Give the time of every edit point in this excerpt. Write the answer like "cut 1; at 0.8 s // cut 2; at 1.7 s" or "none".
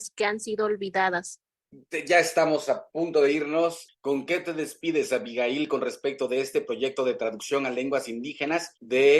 cut 1; at 3.9 s